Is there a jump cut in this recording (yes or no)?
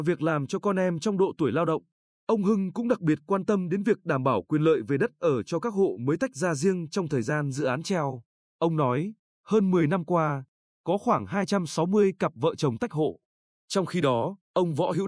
yes